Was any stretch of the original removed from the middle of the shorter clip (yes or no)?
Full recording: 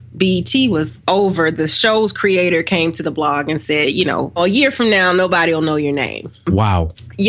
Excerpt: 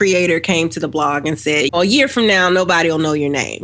yes